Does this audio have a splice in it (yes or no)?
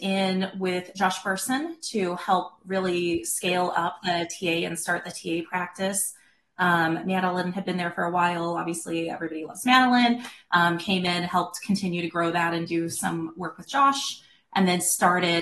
no